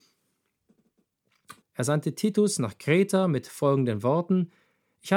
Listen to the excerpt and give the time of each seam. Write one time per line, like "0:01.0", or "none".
0:01.6